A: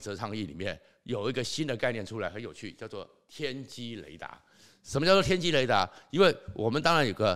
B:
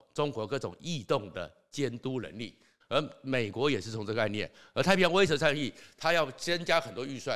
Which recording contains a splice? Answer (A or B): B